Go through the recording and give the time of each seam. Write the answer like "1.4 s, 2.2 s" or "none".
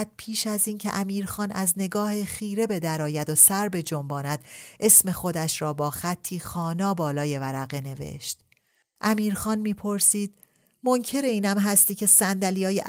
9.0 s